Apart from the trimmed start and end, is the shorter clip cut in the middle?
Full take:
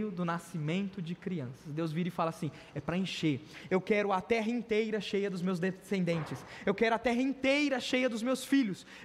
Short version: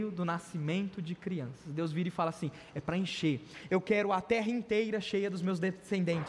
no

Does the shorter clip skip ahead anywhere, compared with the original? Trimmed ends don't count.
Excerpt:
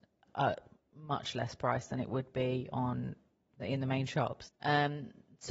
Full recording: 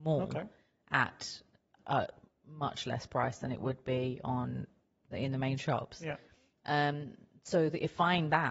yes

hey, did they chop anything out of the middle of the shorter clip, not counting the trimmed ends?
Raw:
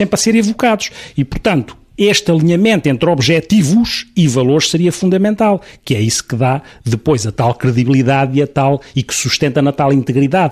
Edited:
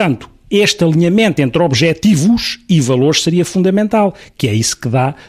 no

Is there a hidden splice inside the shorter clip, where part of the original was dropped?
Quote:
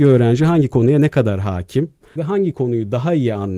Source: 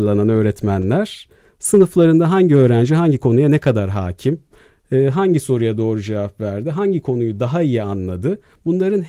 yes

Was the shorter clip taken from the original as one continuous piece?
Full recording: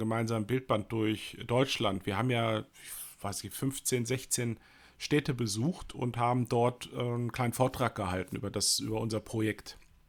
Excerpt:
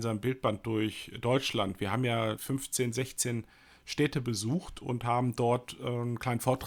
no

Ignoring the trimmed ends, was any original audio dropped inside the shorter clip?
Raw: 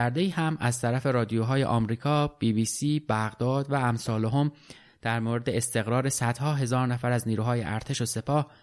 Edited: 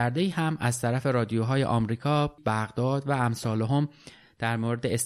yes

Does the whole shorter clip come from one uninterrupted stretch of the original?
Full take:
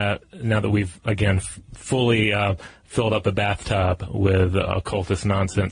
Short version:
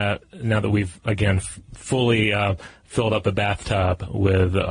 yes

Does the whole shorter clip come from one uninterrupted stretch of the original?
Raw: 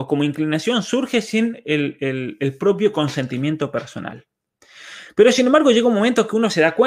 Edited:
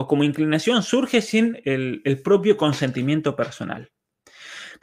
no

